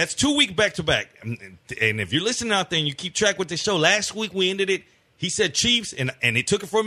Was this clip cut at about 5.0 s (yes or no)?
no